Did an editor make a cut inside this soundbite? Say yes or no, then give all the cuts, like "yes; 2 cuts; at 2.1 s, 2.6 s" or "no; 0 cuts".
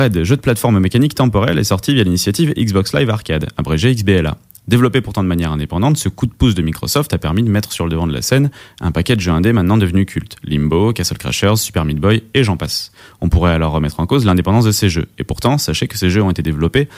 no; 0 cuts